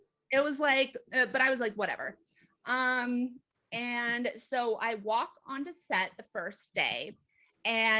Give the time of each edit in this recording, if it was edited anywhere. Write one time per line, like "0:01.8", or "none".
none